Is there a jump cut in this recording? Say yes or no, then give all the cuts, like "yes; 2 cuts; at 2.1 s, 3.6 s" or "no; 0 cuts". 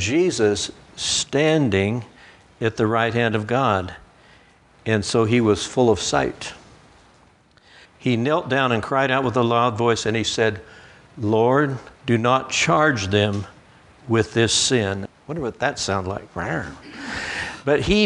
yes; 3 cuts; at 7.9 s, 12.0 s, 15.1 s